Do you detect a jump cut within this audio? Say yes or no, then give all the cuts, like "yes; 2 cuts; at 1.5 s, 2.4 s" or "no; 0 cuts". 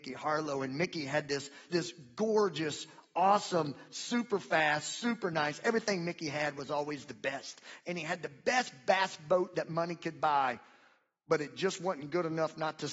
yes; 1 cut; at 1.7 s